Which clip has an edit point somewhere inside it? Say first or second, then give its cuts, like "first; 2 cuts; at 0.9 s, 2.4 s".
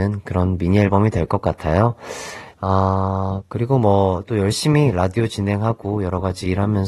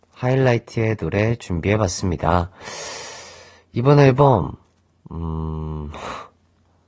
first; 1 cut; at 2.5 s